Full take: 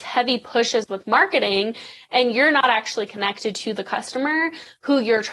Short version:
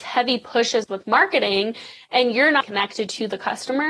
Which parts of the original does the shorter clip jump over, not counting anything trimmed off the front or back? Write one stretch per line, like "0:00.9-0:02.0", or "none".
0:02.6-0:03.1